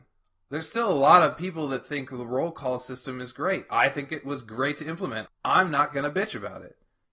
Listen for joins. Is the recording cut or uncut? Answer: cut